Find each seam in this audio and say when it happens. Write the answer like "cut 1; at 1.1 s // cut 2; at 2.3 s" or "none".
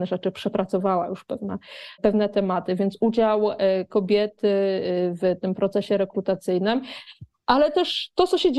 none